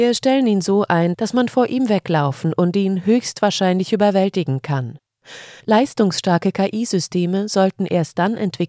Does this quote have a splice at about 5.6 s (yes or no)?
yes